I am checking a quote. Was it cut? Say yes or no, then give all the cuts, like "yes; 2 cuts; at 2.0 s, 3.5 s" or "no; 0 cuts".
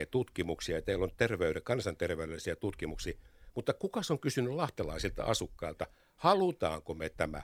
no; 0 cuts